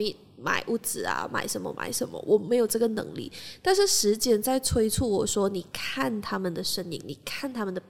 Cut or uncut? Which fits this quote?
uncut